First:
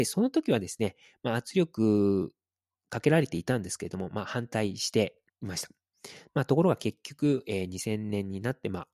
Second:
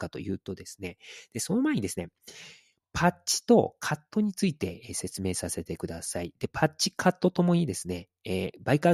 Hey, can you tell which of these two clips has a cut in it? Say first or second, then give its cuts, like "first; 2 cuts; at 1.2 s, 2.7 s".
first; 1 cut; at 5.3 s